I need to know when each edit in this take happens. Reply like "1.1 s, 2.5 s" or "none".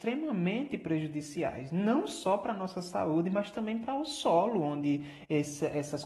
none